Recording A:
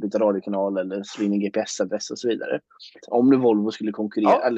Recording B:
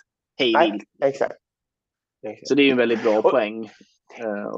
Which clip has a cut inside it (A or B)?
A